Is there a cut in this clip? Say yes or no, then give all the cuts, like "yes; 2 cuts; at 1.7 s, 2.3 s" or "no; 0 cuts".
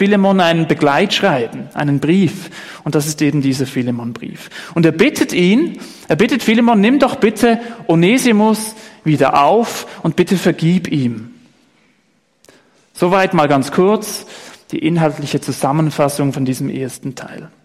no; 0 cuts